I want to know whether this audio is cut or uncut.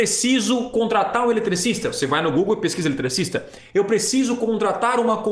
uncut